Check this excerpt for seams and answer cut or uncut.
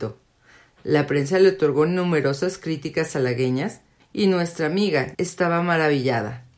cut